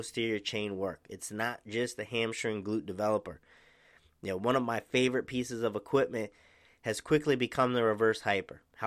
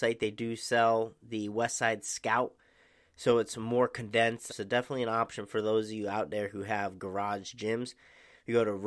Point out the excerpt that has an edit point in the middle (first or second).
second